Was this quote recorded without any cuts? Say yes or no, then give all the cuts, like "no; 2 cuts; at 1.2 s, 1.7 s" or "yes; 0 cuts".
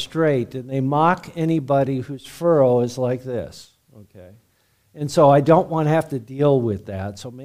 yes; 0 cuts